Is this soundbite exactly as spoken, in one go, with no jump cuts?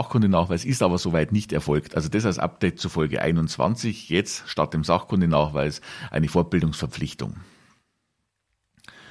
yes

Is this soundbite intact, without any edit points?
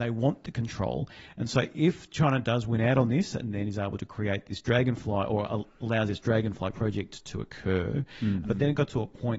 no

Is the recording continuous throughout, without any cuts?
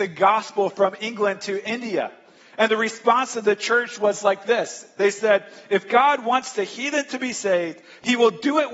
yes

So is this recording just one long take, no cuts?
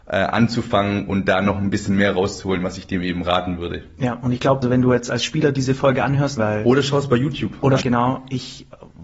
no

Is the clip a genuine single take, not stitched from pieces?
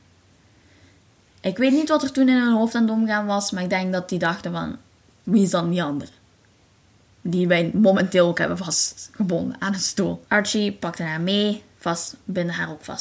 no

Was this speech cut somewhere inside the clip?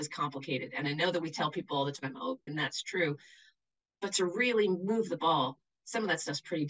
yes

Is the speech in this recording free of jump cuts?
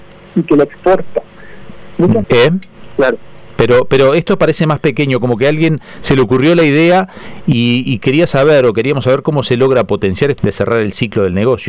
no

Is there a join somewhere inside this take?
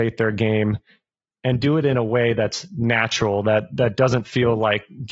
no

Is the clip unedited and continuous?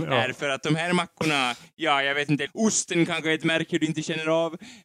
no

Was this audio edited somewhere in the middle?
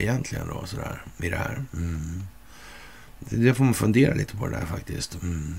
no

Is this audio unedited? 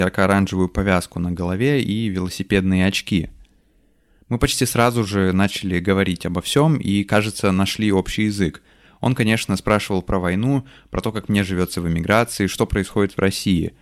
yes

